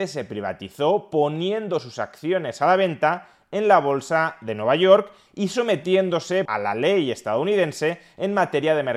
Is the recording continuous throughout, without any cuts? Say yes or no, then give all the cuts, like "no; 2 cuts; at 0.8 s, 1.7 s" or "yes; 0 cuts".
no; 1 cut; at 6.5 s